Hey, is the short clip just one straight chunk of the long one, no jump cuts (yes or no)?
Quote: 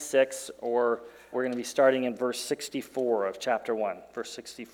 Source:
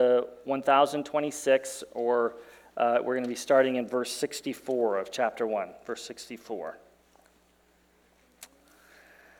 no